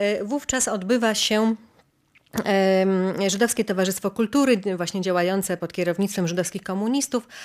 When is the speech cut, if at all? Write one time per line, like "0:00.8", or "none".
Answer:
0:05.6